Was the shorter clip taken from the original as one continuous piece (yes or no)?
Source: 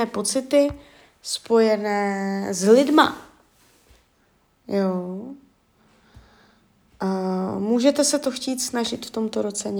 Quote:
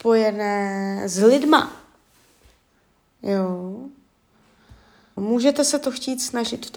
no